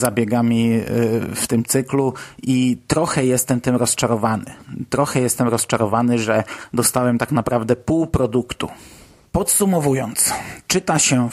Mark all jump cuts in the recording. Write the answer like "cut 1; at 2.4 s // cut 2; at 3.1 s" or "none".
none